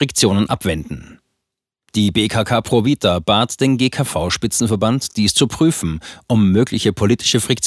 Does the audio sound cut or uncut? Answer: uncut